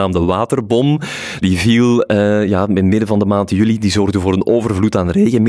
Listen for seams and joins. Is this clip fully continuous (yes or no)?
yes